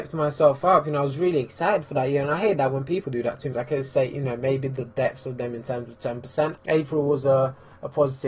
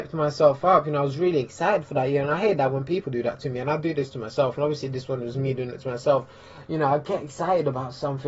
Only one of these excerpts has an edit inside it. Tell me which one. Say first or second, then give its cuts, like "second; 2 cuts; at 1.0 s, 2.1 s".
first; 2 cuts; at 3.5 s, 6.6 s